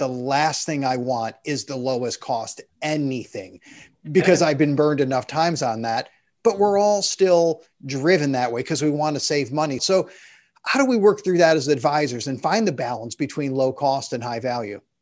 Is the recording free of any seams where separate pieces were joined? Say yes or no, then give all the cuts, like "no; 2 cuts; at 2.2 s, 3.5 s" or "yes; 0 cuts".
no; 1 cut; at 9.8 s